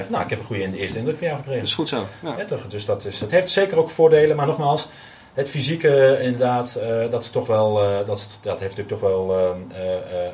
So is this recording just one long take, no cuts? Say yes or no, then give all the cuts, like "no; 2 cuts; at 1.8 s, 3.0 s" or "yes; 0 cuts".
yes; 0 cuts